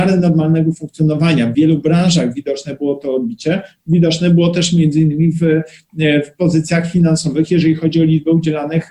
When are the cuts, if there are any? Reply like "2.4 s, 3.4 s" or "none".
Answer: none

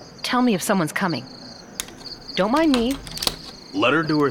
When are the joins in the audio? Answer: 2.3 s

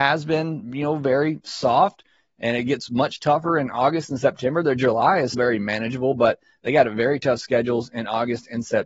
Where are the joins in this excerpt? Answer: 5.3 s

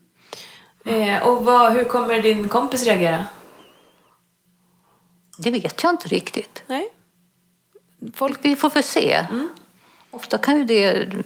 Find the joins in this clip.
none

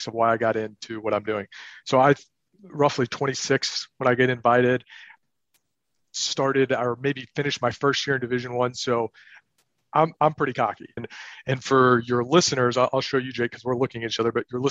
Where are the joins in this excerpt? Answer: 11.0 s

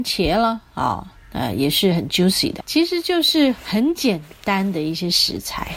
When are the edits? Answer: 2.6 s

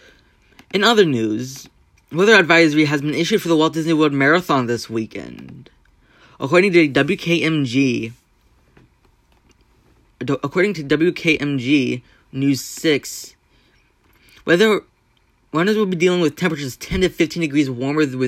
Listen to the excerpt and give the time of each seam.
2.0 s

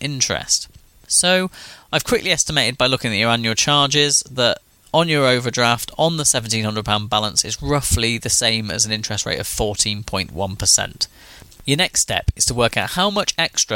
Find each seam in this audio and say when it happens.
none

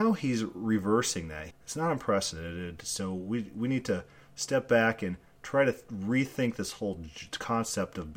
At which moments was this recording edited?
1.5 s

